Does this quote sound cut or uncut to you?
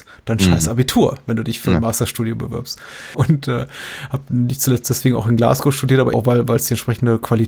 cut